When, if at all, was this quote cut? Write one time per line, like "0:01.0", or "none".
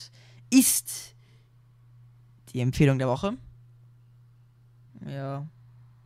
0:04.9